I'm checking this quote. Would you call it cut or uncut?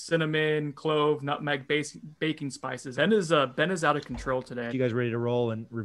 cut